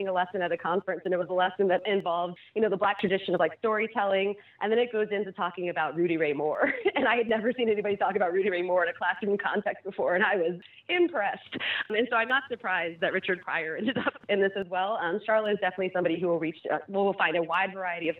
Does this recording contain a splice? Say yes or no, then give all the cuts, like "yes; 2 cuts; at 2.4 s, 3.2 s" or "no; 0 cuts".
no; 0 cuts